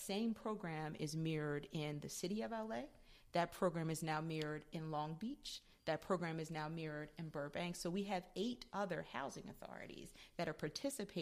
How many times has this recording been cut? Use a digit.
0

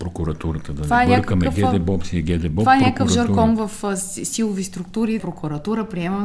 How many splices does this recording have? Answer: 1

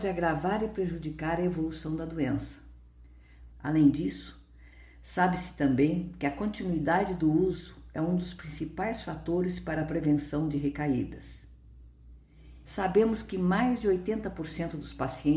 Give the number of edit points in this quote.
2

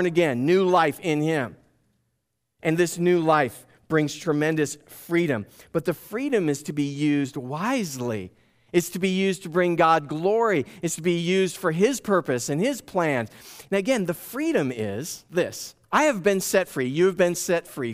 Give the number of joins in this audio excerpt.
2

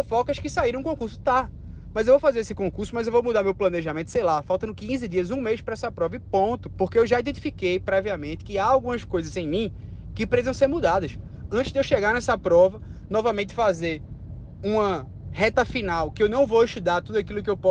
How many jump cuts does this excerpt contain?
1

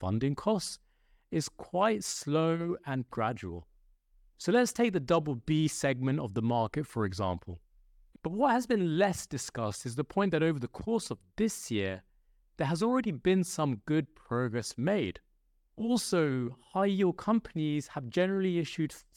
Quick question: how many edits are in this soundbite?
3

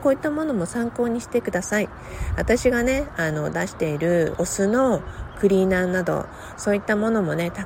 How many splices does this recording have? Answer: 1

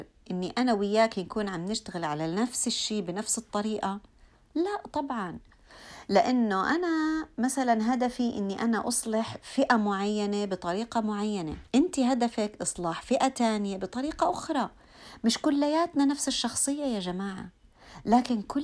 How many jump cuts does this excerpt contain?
1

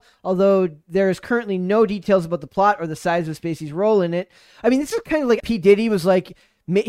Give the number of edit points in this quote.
1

